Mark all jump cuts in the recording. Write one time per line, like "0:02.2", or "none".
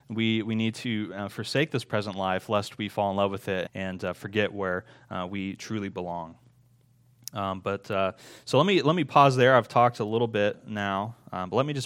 0:03.7